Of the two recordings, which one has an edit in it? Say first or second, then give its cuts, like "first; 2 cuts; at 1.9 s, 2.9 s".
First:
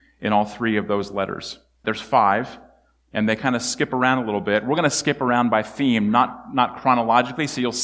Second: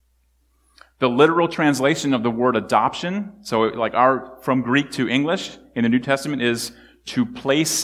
first; 1 cut; at 1.8 s